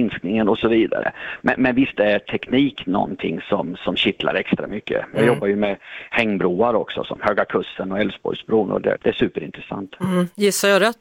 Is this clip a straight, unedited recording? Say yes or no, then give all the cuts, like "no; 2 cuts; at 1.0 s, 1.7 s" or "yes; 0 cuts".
no; 1 cut; at 9.0 s